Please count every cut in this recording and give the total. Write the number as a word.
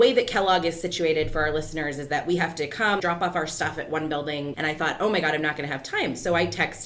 two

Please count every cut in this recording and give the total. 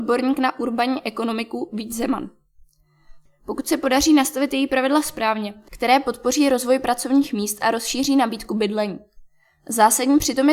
two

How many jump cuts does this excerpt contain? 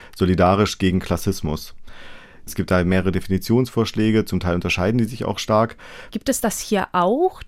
two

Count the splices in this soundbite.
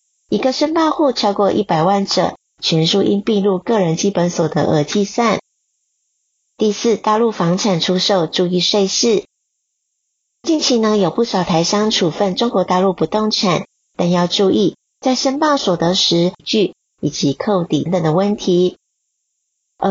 two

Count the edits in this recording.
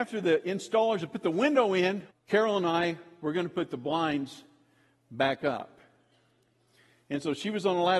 one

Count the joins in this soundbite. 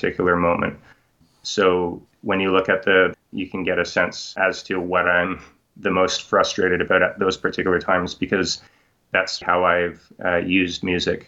two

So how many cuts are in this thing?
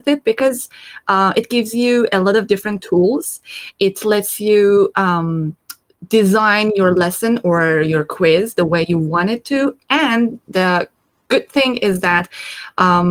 zero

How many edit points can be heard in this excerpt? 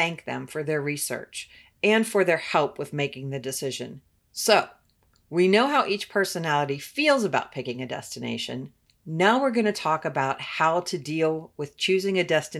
one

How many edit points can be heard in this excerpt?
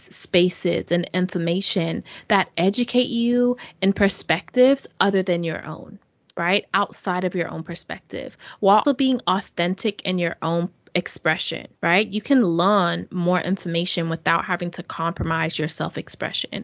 two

